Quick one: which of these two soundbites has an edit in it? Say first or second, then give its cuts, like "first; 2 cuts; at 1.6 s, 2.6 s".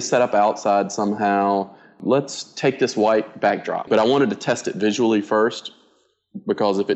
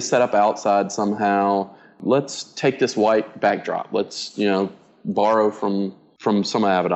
first; 1 cut; at 3.9 s